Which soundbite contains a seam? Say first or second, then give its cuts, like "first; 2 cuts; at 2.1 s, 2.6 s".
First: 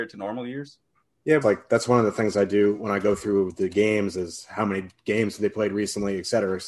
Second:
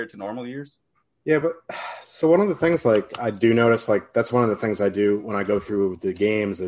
first; 1 cut; at 1.4 s